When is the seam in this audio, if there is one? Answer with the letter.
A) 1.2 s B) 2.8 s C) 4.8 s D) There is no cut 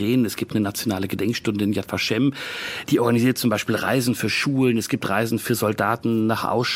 B